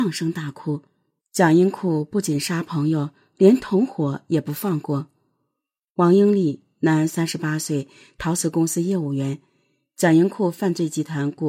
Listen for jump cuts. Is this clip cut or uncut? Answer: cut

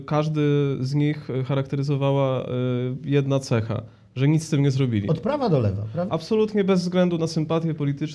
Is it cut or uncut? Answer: cut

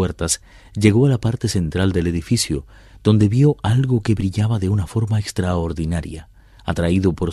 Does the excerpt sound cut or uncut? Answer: uncut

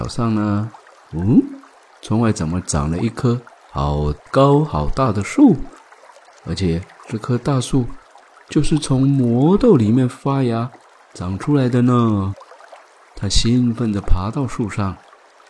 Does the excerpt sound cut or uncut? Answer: cut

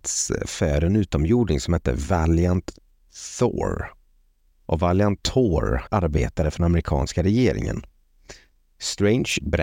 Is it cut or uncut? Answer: cut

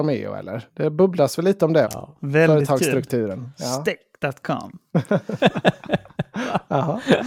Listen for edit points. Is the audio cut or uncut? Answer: cut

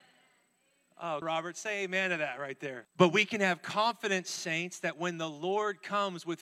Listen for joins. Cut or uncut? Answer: cut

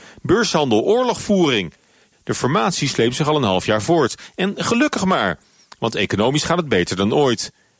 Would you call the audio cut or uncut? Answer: cut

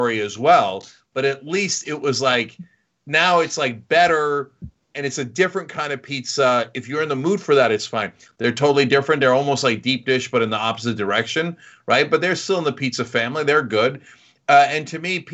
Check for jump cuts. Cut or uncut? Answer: cut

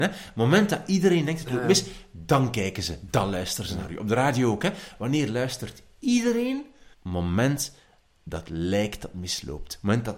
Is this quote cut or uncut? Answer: cut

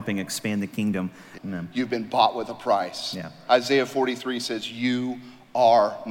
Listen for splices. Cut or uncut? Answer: cut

